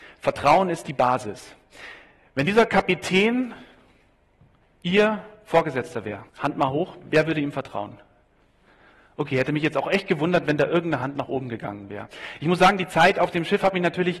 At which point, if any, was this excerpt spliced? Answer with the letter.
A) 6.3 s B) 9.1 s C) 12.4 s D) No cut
A